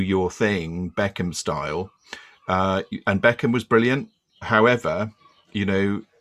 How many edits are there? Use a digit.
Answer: 0